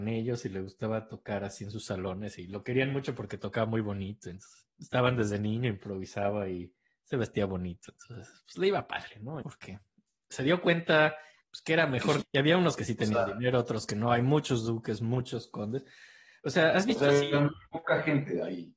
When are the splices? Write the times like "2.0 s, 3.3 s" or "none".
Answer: 9.4 s, 12.2 s